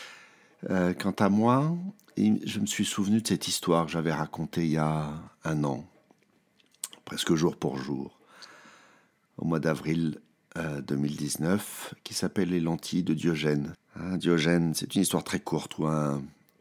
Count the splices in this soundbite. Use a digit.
1